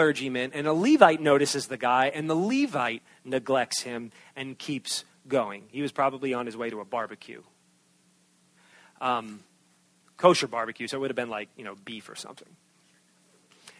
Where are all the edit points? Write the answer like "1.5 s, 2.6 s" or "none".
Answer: none